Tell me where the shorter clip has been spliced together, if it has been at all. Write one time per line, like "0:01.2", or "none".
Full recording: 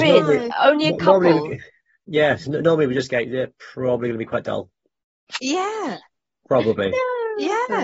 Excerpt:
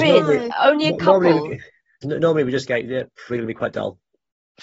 0:02.0
0:03.3